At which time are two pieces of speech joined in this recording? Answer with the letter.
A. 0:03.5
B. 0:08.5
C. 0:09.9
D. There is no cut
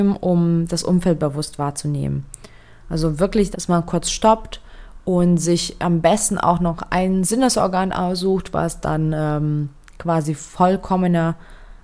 A